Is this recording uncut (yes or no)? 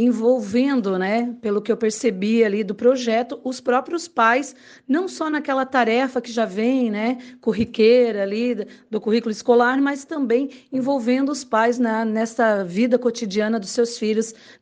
yes